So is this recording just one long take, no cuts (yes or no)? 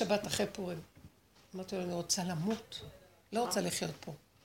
yes